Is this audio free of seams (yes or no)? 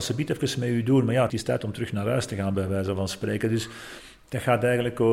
no